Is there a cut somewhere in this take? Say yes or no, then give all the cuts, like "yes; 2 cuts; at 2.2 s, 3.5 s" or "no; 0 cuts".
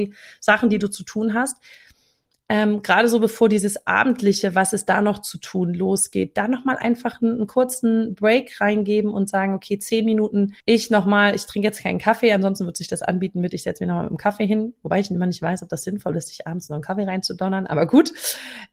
yes; 1 cut; at 10.6 s